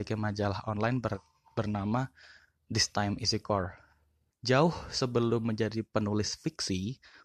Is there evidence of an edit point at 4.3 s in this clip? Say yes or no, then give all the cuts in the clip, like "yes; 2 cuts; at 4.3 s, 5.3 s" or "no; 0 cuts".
yes; 1 cut; at 4.3 s